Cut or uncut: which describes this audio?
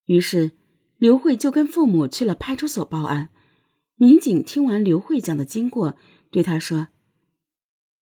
uncut